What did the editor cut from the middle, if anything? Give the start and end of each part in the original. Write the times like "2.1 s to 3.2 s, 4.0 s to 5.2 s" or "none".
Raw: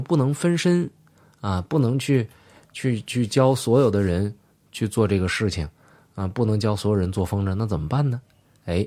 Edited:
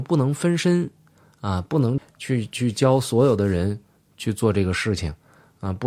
2.0 s to 2.5 s